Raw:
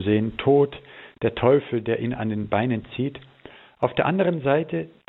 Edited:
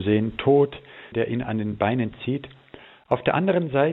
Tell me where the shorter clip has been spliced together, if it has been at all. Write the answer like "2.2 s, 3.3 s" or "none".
1.1 s